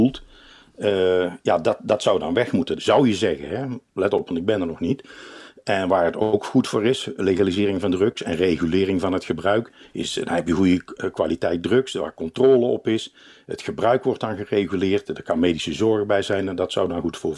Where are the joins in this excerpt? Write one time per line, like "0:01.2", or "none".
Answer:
0:02.8